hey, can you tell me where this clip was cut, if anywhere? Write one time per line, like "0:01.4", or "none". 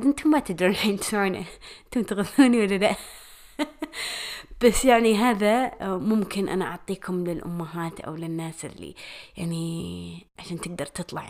none

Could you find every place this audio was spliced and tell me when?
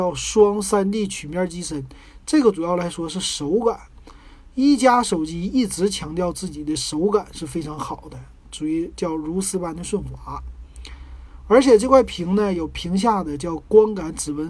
none

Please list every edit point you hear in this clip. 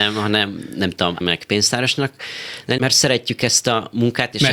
0:01.2
0:02.8

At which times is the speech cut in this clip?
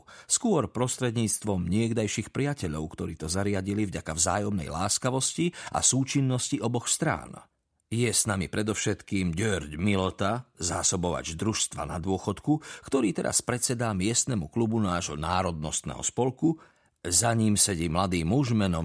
none

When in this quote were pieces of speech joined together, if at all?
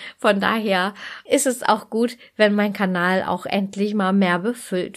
0:01.3

